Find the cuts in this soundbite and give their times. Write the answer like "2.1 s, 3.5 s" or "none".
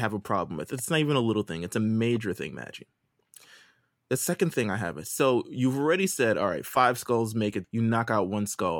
7.6 s